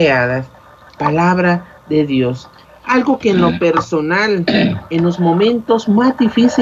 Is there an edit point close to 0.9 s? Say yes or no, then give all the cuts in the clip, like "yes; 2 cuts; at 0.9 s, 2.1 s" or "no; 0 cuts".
no; 1 cut; at 2.6 s